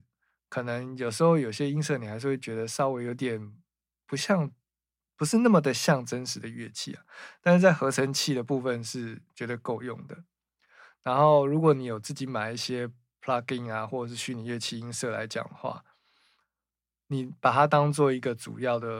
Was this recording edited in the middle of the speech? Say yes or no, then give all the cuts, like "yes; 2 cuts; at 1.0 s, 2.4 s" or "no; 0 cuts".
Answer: no; 0 cuts